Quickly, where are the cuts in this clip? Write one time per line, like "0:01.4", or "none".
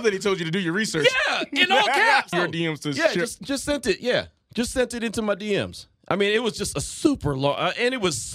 0:02.3

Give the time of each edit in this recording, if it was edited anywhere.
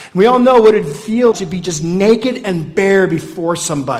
0:01.3

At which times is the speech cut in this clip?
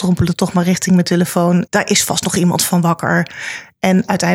0:01.7

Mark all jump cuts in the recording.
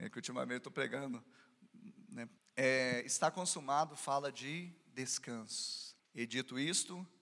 0:02.4
0:06.0

